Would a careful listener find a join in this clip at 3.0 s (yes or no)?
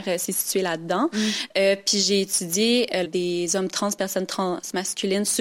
yes